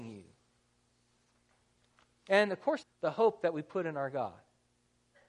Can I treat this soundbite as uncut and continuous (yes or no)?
no